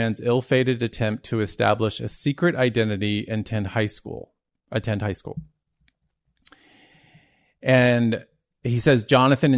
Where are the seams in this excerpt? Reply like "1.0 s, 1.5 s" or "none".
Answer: none